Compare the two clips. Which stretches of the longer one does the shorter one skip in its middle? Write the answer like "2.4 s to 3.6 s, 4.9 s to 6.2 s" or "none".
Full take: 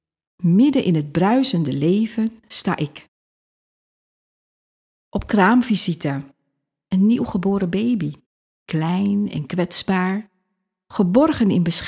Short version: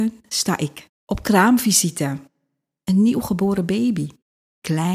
3.1 s to 5.0 s